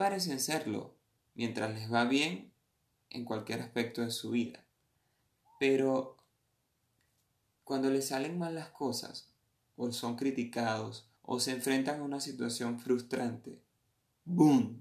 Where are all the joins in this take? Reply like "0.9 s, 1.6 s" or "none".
11.2 s